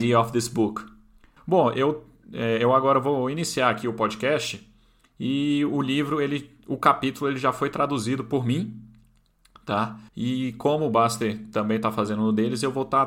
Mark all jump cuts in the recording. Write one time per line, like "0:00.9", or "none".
0:01.4
0:10.1